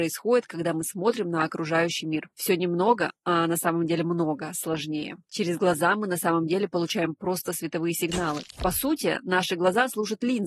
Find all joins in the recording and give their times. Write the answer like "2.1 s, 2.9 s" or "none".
2.3 s